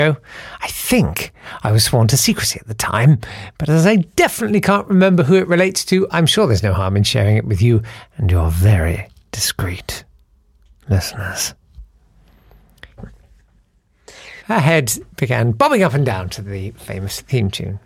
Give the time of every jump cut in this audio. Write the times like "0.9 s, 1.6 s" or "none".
13.0 s, 14.4 s